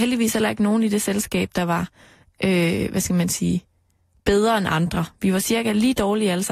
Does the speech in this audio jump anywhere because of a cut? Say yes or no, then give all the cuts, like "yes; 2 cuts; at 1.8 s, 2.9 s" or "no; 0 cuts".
no; 0 cuts